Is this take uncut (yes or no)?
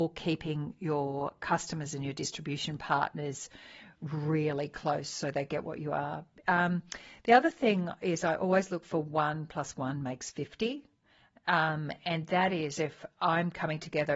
yes